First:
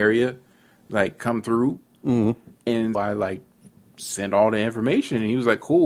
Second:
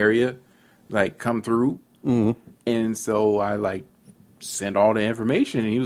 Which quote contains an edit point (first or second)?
first